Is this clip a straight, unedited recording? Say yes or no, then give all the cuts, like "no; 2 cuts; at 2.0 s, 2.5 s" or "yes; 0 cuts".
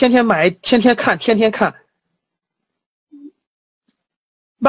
yes; 0 cuts